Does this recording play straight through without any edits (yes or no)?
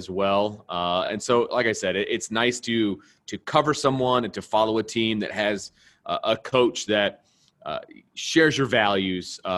yes